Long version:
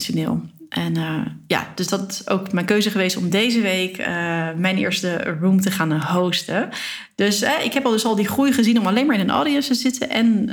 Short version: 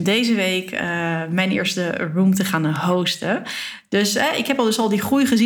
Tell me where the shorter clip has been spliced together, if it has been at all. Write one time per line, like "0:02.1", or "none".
none